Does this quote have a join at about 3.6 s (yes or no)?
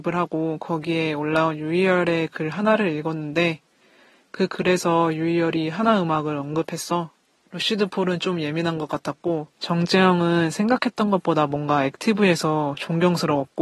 no